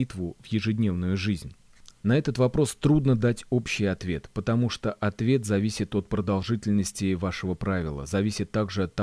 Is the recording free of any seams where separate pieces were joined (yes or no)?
no